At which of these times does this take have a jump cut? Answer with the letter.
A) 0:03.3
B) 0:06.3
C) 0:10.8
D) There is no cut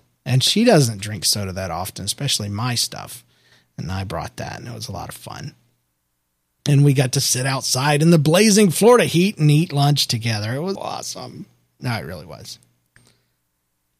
C